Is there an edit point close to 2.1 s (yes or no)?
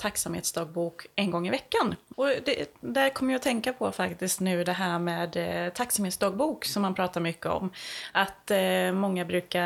yes